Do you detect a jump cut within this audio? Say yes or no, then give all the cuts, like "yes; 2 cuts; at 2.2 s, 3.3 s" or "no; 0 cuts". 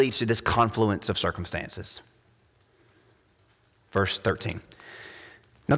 no; 0 cuts